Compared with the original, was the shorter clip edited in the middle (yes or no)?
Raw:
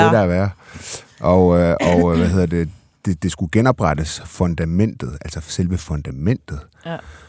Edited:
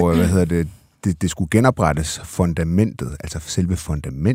no